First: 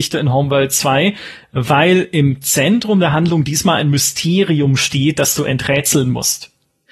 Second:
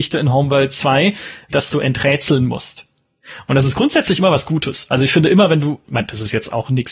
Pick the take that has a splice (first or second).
second